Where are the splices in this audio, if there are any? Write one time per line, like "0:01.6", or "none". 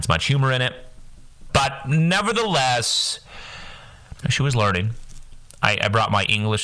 0:01.5
0:04.2